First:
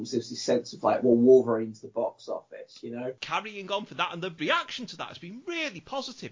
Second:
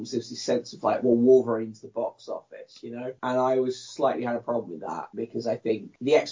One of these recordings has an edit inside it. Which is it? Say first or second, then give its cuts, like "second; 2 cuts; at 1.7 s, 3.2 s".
first; 1 cut; at 3.2 s